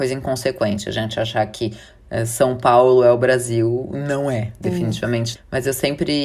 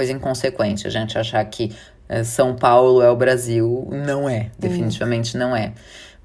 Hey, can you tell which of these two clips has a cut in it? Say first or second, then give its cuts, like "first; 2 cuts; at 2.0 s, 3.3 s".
first; 1 cut; at 5.3 s